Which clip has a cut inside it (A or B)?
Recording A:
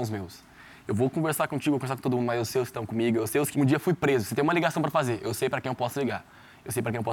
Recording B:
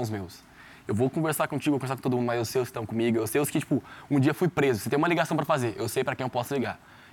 A